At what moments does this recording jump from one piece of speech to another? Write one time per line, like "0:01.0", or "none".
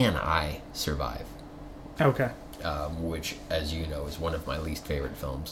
0:02.0